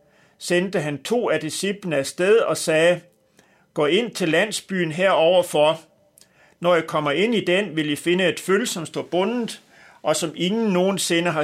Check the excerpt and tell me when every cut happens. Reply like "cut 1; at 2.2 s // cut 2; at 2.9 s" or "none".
none